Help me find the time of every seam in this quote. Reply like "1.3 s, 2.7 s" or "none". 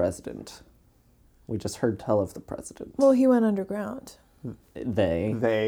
none